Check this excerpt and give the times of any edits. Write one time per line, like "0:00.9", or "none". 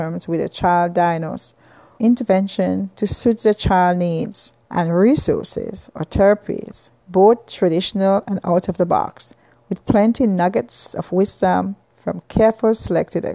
0:02.0
0:04.6
0:07.0